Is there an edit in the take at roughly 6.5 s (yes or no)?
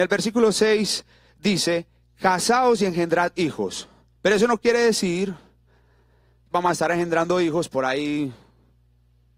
yes